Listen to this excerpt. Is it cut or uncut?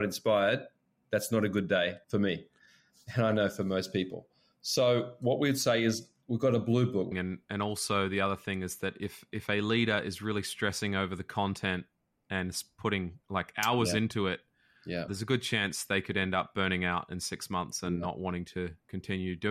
cut